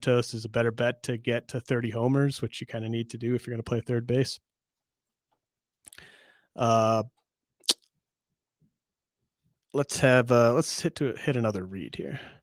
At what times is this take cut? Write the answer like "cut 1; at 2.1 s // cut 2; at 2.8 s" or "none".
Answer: none